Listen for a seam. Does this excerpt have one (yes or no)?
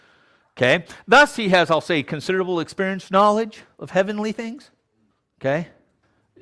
no